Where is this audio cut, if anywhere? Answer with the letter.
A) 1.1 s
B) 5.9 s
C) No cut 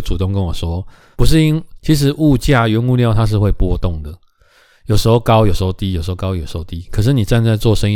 A